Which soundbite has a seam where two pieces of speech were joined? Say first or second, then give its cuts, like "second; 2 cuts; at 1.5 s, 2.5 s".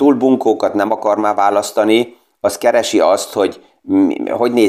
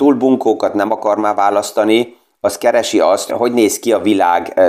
second; 1 cut; at 3.3 s